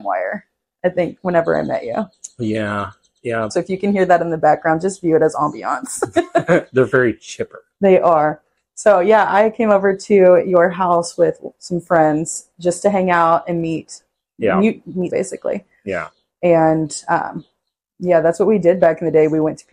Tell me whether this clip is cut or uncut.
cut